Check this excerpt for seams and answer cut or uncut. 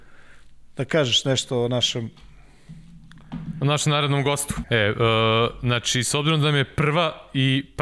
cut